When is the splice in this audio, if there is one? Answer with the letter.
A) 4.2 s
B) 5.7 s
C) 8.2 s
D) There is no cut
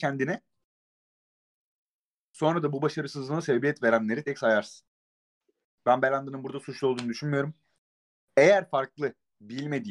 A